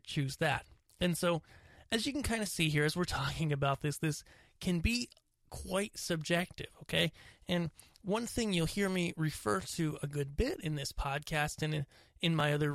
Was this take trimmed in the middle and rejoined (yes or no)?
no